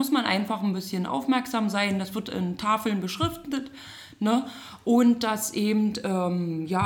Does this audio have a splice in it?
no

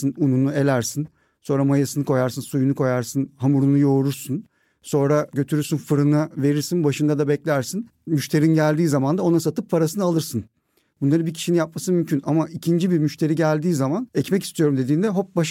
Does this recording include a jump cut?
no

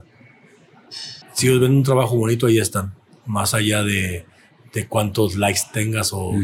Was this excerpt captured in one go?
no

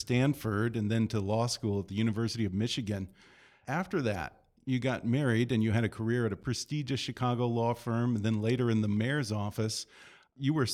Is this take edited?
no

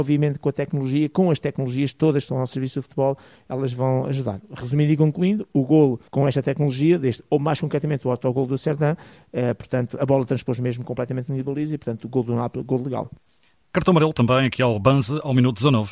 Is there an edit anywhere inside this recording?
yes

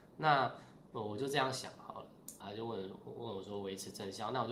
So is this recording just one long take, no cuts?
no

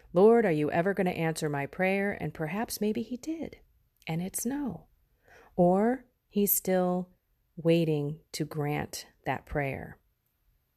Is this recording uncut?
yes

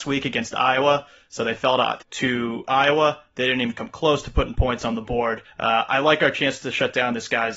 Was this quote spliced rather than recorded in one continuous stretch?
yes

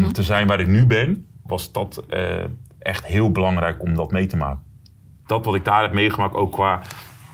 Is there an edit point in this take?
yes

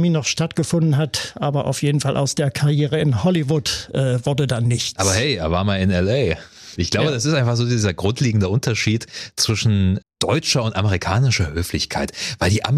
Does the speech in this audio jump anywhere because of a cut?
yes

